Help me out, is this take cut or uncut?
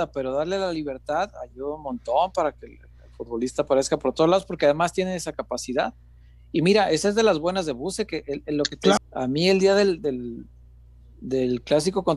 cut